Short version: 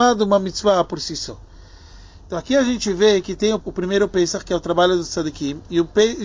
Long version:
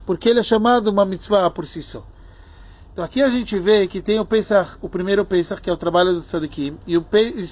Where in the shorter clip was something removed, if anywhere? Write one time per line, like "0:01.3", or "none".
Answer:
0:03.6